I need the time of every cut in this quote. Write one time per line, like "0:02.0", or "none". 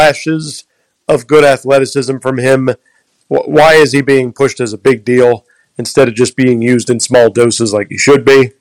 0:03.2